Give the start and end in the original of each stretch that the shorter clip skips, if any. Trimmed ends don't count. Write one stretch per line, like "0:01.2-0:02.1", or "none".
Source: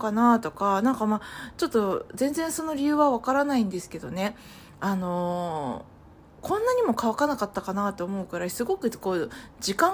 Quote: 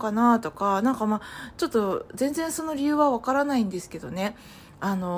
none